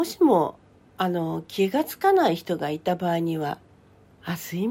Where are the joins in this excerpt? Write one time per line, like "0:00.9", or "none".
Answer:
0:03.6